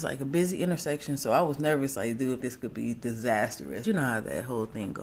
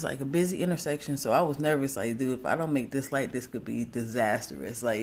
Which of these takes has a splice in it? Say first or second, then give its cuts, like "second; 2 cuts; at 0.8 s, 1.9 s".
first; 2 cuts; at 2.4 s, 3.8 s